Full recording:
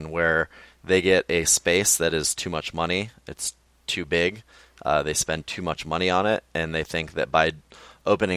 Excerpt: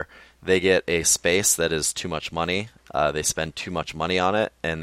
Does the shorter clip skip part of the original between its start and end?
yes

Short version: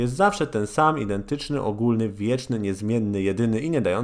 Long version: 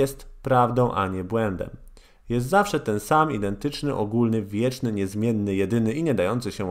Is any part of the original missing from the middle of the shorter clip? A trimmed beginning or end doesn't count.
no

